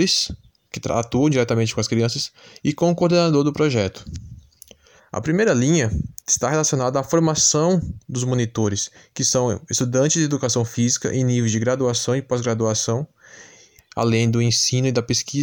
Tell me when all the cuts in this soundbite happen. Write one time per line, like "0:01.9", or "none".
0:05.0
0:06.2
0:13.8